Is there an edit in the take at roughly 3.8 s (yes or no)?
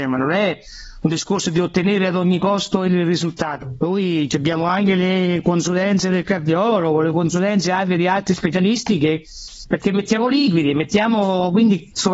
yes